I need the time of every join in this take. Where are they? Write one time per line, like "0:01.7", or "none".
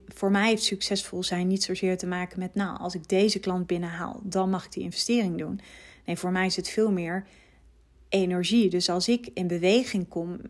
none